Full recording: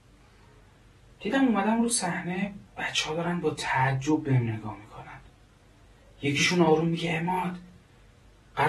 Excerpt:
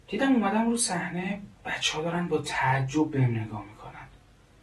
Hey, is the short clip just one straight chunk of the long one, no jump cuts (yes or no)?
yes